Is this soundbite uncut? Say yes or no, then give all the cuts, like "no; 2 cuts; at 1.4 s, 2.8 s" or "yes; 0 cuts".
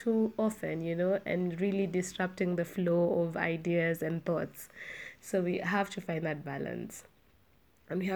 yes; 0 cuts